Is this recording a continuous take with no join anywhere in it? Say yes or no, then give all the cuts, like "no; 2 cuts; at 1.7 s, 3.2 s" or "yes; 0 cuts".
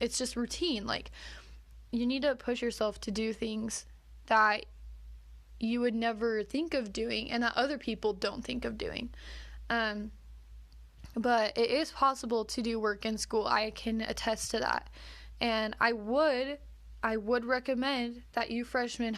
yes; 0 cuts